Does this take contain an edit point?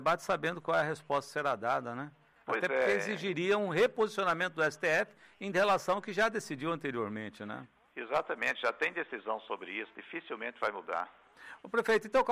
no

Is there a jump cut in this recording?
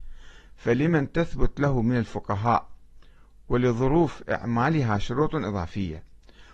no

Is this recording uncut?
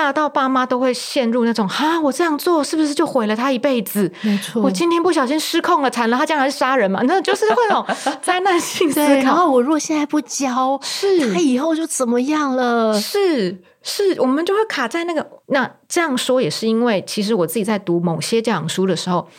no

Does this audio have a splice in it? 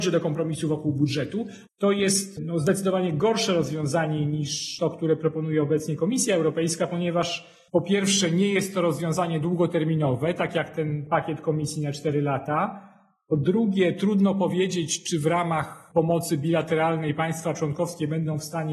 yes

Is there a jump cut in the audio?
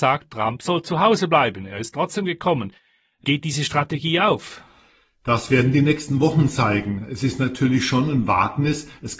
no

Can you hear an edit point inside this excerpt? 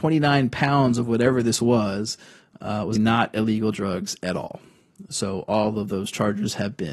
yes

